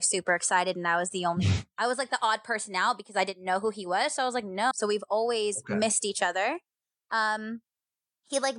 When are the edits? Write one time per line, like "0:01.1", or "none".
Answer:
0:04.7

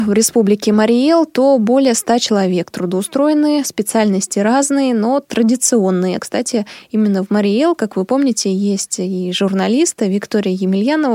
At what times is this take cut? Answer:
0:06.2

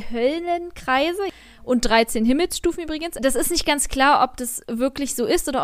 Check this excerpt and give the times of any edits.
none

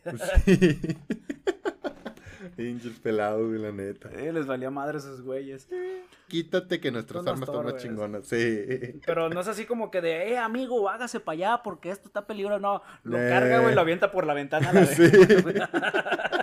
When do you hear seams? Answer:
0:06.3

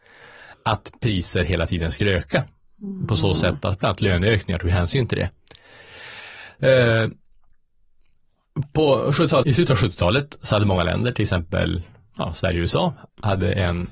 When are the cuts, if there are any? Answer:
0:06.6
0:09.4

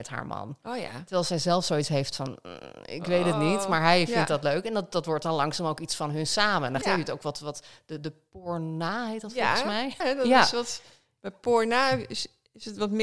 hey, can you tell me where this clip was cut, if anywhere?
0:06.8
0:10.0

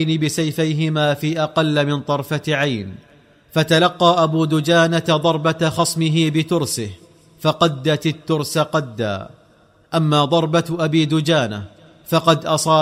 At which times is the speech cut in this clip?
none

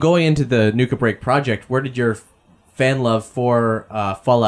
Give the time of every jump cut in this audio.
none

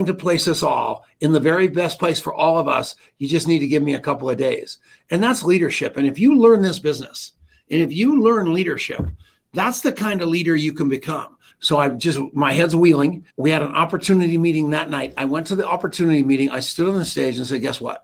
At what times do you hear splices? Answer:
0:11.5
0:13.3

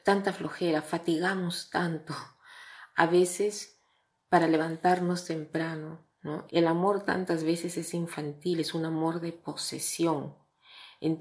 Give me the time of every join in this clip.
0:06.5

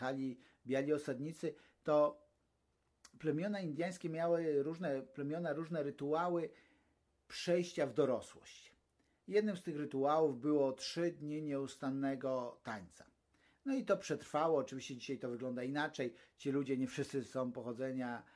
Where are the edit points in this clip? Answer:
none

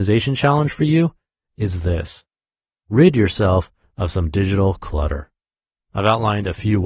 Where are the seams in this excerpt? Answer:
none

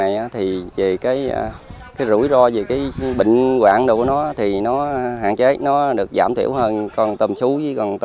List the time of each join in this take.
none

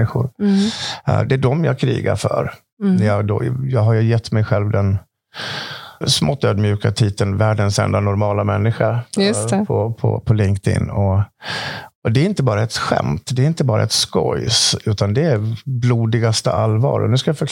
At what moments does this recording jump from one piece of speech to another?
0:06.0

